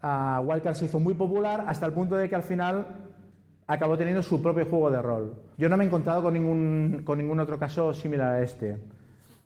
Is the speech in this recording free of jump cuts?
no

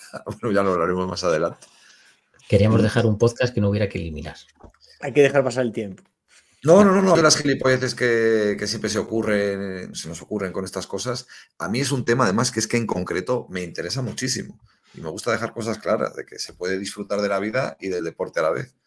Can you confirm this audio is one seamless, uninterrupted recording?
no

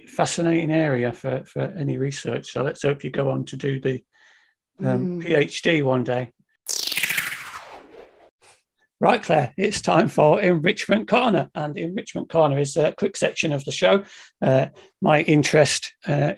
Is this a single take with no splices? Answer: yes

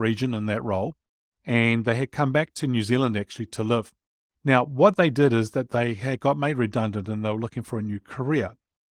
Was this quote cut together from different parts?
no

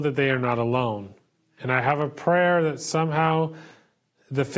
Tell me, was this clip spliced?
no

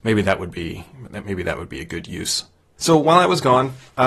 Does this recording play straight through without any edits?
no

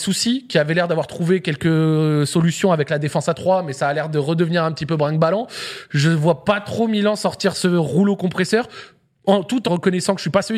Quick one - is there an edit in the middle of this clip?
yes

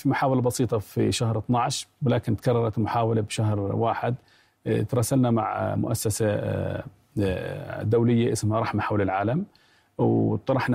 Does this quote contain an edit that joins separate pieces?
no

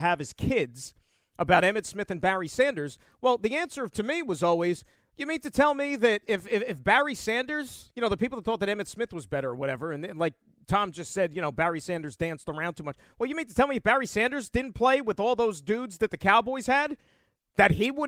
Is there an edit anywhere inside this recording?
no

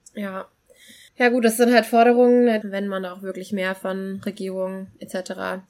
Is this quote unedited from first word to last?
no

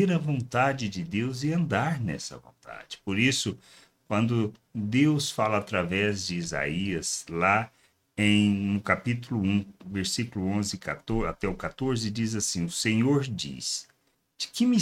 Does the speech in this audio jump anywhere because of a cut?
no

